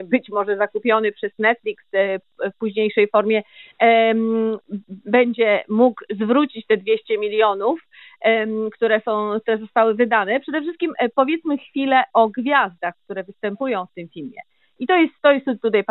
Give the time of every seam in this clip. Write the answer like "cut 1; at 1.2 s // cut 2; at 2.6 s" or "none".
none